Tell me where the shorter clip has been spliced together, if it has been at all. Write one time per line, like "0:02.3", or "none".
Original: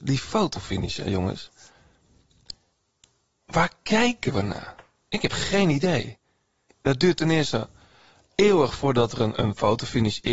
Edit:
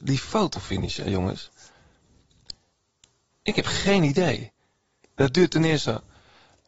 0:03.3